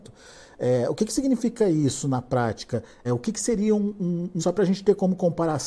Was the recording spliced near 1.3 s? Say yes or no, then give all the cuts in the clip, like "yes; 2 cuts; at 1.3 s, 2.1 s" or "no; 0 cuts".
no; 2 cuts; at 3.0 s, 4.4 s